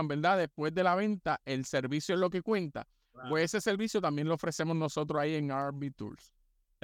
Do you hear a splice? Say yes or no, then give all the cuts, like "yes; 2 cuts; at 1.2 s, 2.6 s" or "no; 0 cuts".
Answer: no; 0 cuts